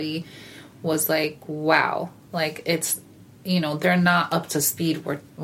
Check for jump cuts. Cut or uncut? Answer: uncut